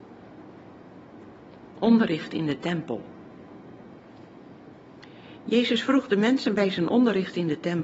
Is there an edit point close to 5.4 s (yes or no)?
no